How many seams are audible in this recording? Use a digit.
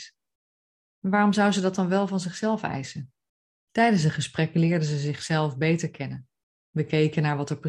1